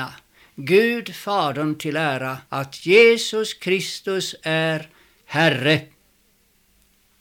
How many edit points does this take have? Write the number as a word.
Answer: one